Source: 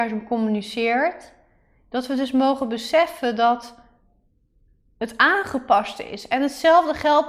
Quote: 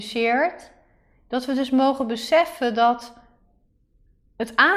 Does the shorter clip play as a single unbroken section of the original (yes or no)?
yes